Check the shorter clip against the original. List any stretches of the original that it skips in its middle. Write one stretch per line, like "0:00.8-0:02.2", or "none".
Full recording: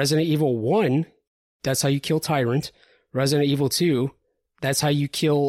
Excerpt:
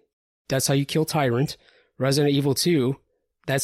none